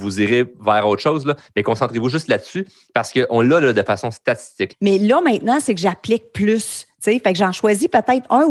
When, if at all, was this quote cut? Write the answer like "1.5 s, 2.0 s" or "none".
4.7 s